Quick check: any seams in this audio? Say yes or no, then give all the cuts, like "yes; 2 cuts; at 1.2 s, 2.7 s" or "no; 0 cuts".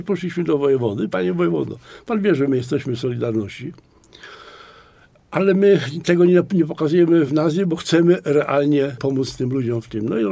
yes; 2 cuts; at 1.1 s, 7.3 s